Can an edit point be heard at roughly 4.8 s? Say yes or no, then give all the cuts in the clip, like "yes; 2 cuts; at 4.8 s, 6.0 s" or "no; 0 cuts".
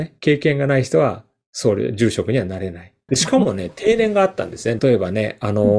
yes; 2 cuts; at 3.1 s, 4.8 s